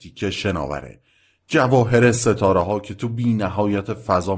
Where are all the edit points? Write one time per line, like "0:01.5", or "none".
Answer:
none